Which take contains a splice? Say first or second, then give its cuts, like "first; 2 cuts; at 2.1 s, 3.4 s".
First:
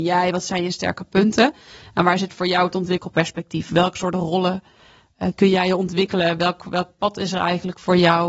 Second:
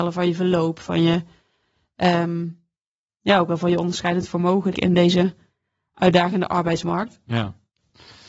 second; 1 cut; at 4.7 s